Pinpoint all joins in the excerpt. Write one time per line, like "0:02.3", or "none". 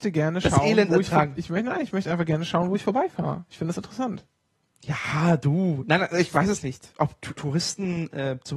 0:07.4